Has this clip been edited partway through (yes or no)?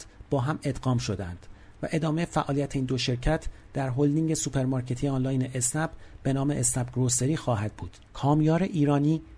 yes